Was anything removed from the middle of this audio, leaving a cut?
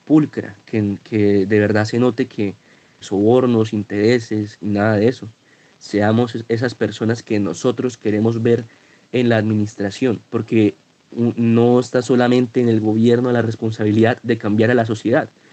yes; 3 cuts; at 3.0 s, 4.6 s, 10.2 s

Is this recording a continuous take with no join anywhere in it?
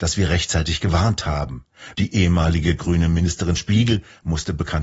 no; 1 cut; at 1.9 s

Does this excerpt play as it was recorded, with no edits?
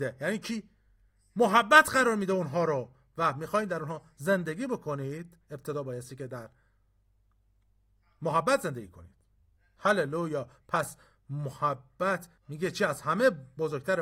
no; 1 cut; at 12.4 s

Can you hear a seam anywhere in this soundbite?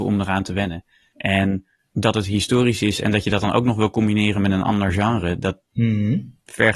no; 0 cuts

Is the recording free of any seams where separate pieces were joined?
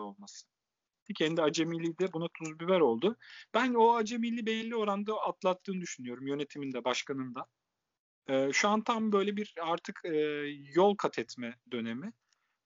no; 1 cut; at 1.1 s

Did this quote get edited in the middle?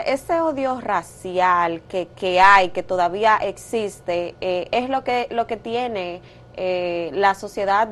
no; 0 cuts

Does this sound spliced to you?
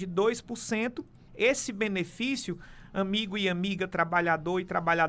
yes; 1 cut; at 1.3 s

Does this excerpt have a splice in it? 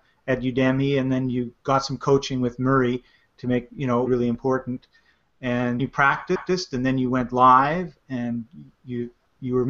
yes; 2 cuts; at 4.1 s, 5.8 s

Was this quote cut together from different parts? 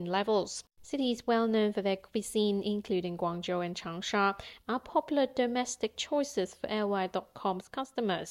yes; 1 cut; at 4.6 s

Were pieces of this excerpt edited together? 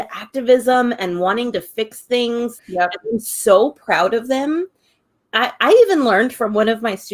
yes; 1 cut; at 2.6 s

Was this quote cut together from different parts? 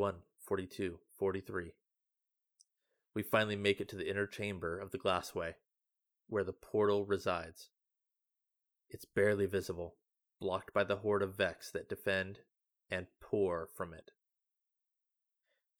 no; 0 cuts

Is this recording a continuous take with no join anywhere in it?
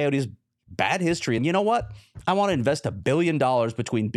no; 1 cut; at 1.4 s

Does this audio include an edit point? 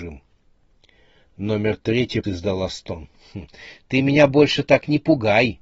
yes; 1 cut; at 2.2 s

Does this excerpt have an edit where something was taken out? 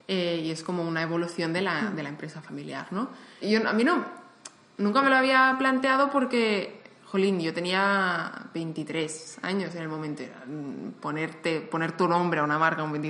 yes; 1 cut; at 3.4 s

